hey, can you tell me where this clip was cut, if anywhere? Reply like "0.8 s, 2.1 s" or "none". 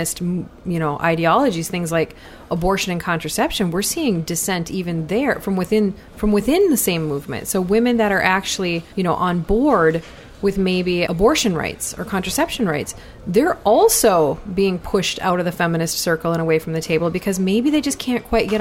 8.9 s, 11.1 s